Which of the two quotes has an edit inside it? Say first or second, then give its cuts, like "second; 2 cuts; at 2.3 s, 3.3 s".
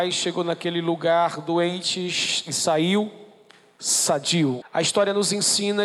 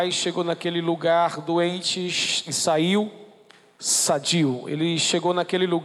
first; 1 cut; at 4.6 s